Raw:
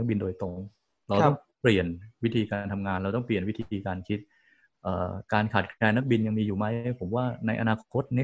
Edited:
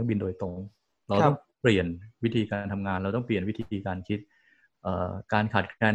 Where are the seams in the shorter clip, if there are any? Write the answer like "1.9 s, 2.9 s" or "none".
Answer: none